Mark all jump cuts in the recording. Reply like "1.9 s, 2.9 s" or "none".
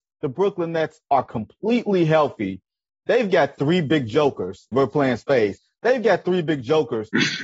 4.7 s